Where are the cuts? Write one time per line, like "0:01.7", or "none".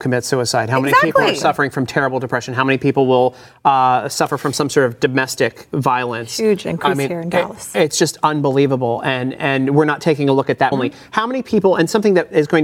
0:10.7